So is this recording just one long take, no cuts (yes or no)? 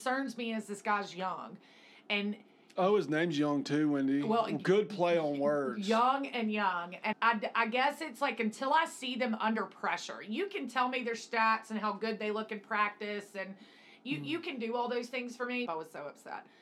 no